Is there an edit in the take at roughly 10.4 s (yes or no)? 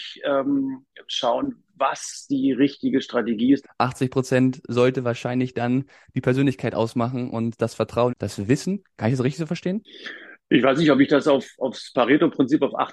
no